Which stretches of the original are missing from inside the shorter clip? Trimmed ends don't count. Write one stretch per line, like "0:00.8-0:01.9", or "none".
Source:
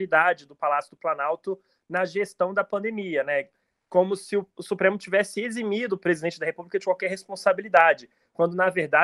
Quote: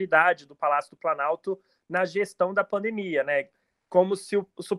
none